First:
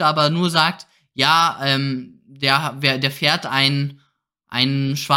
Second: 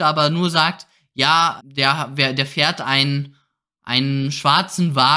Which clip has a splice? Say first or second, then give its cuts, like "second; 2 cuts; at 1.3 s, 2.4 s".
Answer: second; 1 cut; at 1.6 s